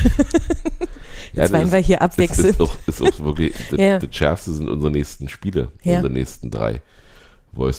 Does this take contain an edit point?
no; 0 cuts

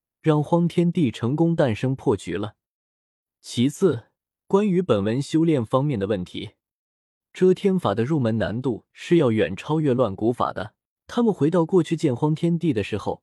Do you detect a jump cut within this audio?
yes; 2 cuts; at 7.2 s, 11.0 s

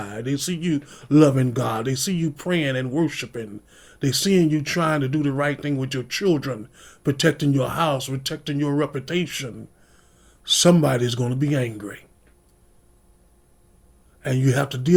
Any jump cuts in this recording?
no; 0 cuts

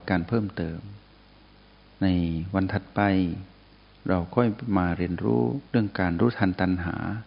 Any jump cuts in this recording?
yes; 1 cut; at 5.7 s

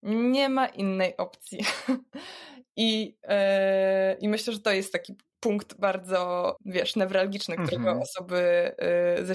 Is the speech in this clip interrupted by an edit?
yes; 1 cut; at 6.6 s

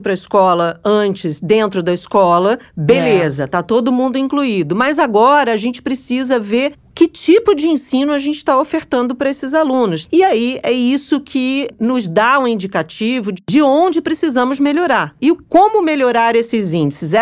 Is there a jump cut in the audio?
yes; 1 cut; at 10.1 s

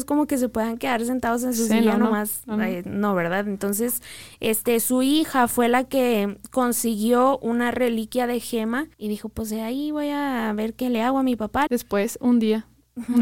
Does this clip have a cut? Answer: yes; 2 cuts; at 8.9 s, 11.7 s

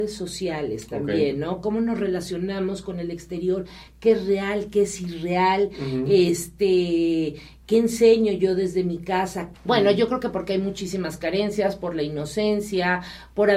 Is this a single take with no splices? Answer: no; 1 cut; at 9.5 s

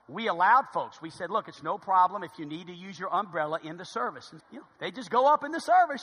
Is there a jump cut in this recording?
yes; 1 cut; at 4.4 s

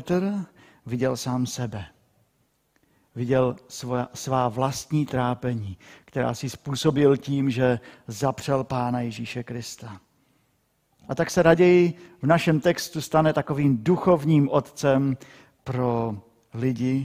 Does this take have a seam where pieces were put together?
no; 0 cuts

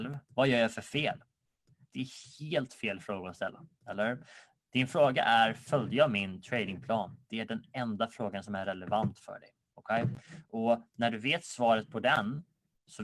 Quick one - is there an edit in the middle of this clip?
no; 0 cuts

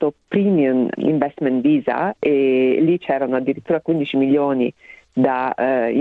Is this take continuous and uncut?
no; 1 cut; at 1.0 s

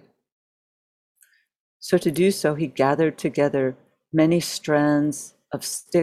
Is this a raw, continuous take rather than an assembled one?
yes; 0 cuts

